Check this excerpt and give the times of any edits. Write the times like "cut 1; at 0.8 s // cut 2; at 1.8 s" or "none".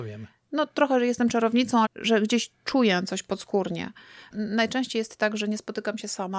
cut 1; at 1.9 s // cut 2; at 4.3 s

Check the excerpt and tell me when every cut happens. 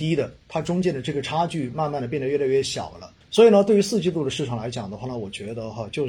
cut 1; at 3.2 s

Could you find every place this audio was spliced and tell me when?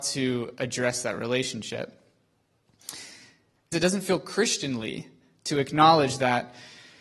cut 1; at 3.7 s

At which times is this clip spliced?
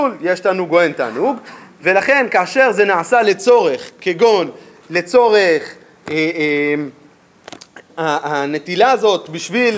none

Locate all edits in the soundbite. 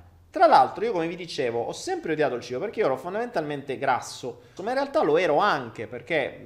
cut 1; at 4.6 s

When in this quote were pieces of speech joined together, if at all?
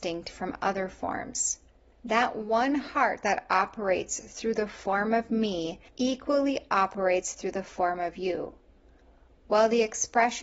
cut 1; at 1.9 s // cut 2; at 5.9 s

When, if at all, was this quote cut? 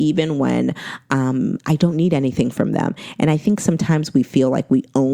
none

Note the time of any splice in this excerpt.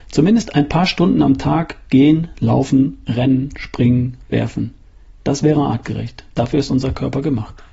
none

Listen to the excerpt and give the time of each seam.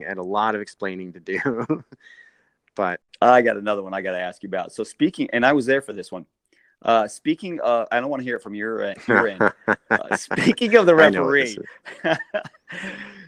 none

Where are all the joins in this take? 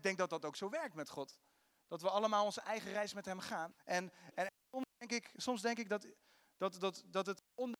cut 1; at 3.7 s

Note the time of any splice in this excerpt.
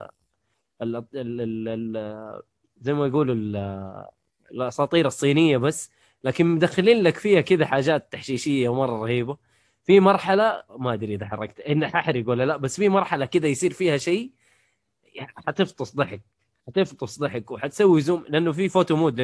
cut 1; at 10.7 s

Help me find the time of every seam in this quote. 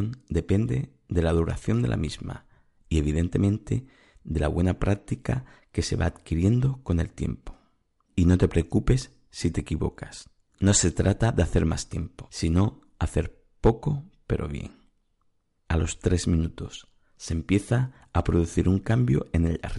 cut 1; at 10.5 s // cut 2; at 15.6 s

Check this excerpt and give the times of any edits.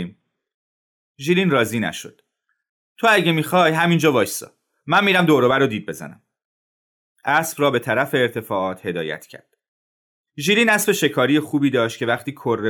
none

